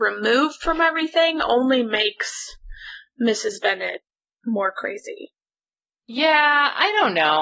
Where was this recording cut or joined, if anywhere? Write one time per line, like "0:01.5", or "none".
none